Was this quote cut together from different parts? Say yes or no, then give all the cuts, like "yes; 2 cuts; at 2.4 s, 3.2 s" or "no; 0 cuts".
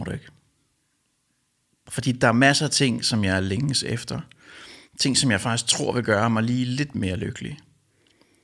yes; 1 cut; at 4.9 s